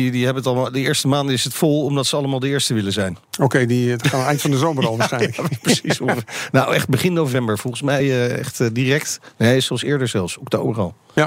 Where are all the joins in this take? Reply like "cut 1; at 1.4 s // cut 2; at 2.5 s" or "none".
none